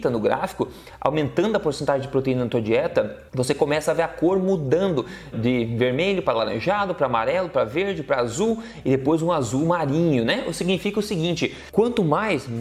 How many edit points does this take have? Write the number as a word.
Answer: two